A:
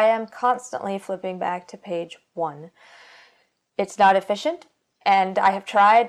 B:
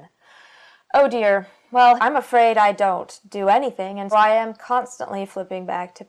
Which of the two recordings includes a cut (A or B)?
B